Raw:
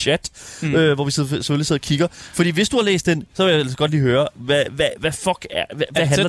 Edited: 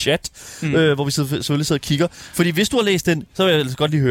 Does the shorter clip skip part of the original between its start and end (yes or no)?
no